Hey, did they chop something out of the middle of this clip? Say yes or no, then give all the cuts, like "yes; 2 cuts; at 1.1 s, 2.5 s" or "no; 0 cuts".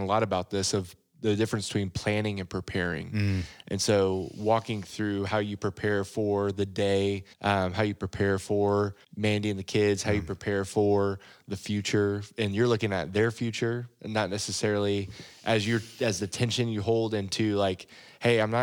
yes; 2 cuts; at 7.3 s, 9.0 s